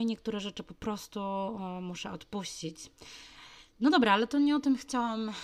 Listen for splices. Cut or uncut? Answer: uncut